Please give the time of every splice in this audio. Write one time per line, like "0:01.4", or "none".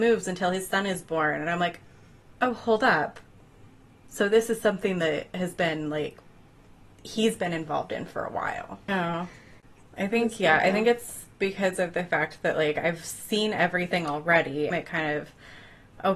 0:08.9
0:14.7